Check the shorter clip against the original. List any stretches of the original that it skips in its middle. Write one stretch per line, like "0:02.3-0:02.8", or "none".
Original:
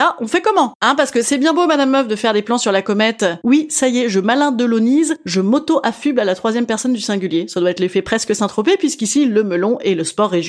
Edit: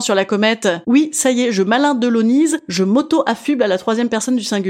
none